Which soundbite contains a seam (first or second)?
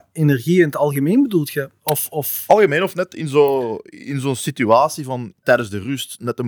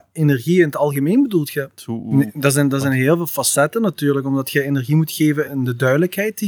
second